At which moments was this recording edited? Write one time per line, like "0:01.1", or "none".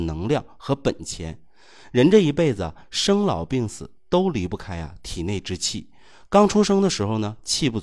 none